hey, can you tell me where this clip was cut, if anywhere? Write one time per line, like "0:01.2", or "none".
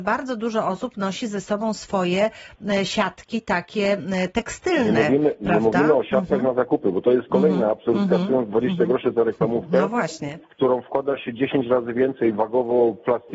none